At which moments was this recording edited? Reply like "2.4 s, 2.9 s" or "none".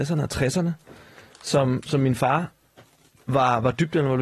none